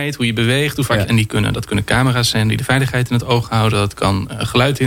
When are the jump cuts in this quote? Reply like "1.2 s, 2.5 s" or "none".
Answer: 1.0 s